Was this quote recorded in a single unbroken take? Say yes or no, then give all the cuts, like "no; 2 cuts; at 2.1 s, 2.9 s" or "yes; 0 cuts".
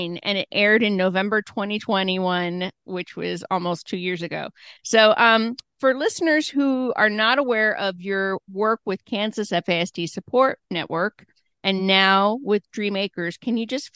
yes; 0 cuts